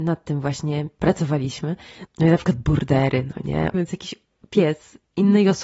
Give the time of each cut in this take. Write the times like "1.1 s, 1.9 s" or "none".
2.1 s, 3.7 s